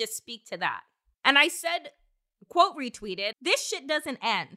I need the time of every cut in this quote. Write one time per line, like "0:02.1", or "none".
0:01.1
0:03.3